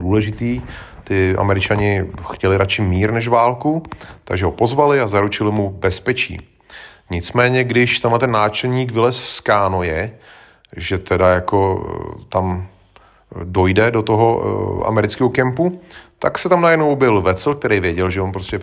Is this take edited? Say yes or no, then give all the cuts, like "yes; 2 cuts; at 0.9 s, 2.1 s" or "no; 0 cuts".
no; 0 cuts